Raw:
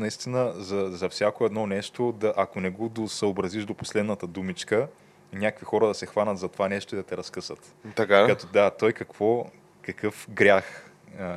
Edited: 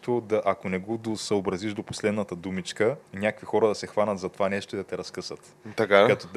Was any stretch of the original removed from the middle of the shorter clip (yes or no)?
yes